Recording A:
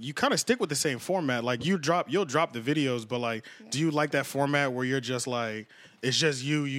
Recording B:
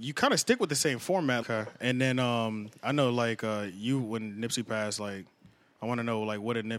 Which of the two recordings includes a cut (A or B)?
B